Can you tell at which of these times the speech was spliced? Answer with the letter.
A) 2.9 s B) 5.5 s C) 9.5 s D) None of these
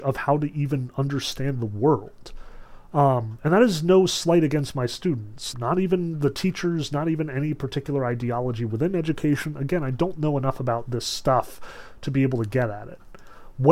B